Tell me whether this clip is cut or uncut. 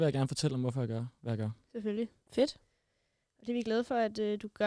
uncut